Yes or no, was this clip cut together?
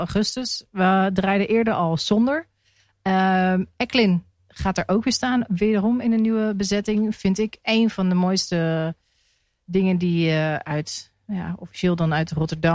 no